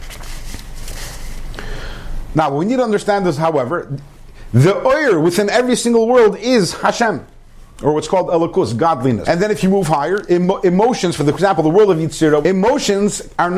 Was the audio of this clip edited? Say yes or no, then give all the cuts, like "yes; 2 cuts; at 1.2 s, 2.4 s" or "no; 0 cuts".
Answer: yes; 2 cuts; at 9.2 s, 12.4 s